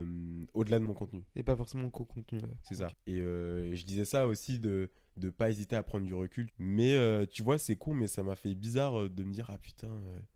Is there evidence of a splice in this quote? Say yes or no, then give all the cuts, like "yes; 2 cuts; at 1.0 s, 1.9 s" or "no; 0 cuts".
yes; 2 cuts; at 2.9 s, 6.5 s